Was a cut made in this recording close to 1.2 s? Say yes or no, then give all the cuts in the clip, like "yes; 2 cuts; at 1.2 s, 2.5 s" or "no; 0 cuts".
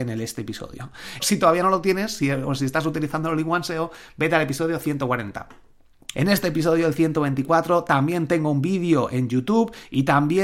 yes; 2 cuts; at 1.2 s, 6.1 s